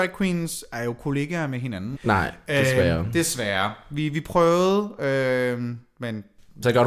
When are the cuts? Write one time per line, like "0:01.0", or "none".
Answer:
0:02.0